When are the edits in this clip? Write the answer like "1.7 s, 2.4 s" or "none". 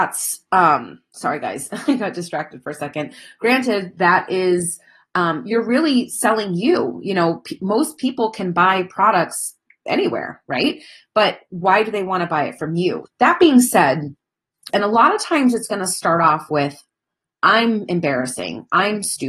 13.1 s, 14.7 s